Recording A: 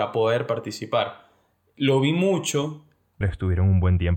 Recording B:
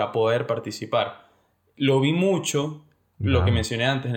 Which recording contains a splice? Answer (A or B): A